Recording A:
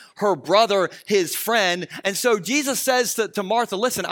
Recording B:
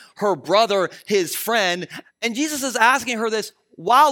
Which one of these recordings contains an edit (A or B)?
B